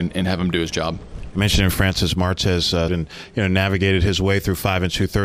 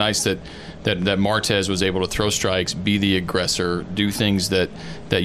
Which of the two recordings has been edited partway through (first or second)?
first